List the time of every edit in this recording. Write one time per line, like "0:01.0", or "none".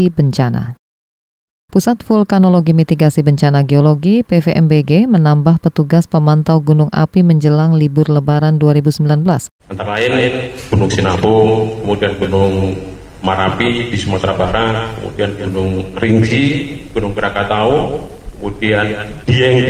0:09.6